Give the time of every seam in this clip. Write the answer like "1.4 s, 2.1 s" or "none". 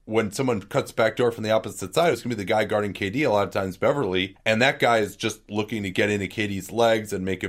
none